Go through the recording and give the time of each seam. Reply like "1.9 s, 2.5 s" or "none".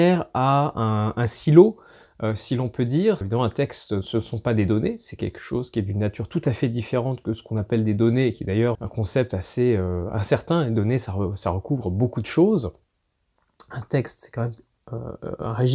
3.2 s, 8.7 s

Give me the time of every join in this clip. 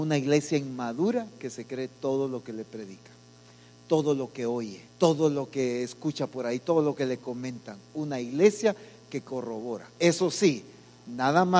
4.9 s

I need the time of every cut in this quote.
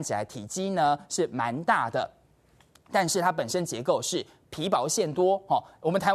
none

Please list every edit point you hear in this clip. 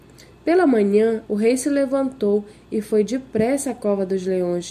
1.2 s

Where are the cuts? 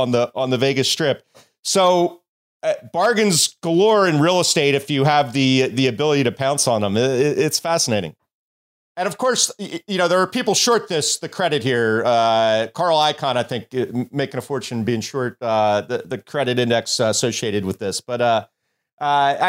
none

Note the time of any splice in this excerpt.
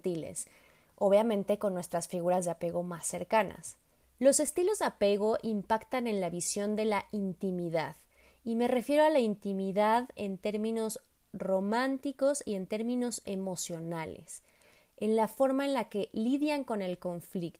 4.0 s

